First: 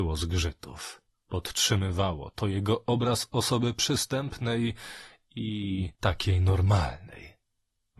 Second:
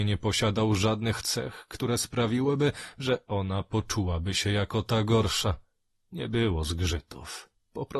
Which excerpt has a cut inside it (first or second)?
first